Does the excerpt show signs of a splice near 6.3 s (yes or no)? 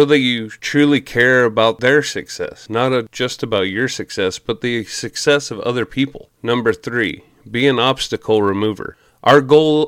no